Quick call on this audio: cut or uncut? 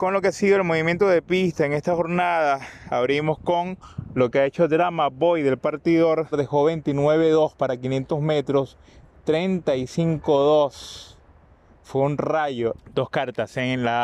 cut